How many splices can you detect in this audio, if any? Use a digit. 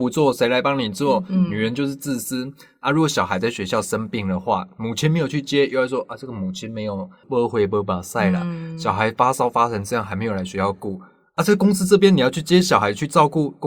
1